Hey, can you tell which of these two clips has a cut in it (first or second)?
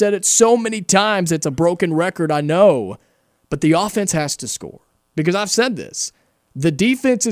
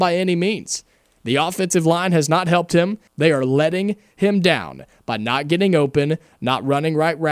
second